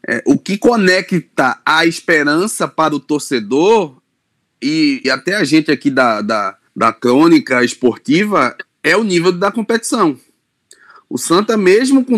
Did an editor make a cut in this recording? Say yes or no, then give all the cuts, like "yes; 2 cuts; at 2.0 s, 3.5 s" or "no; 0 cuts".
yes; 2 cuts; at 5.0 s, 6.7 s